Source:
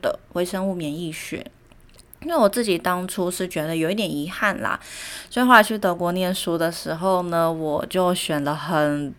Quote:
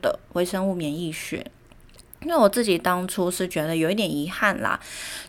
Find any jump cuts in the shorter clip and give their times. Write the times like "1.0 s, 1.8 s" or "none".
none